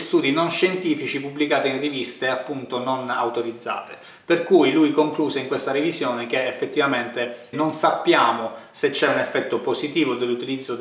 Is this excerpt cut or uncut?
cut